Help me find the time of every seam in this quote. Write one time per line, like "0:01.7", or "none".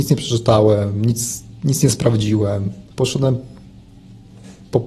0:02.9